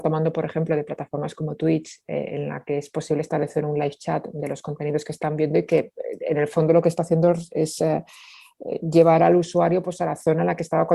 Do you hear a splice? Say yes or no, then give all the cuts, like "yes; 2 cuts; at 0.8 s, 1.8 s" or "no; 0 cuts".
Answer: no; 0 cuts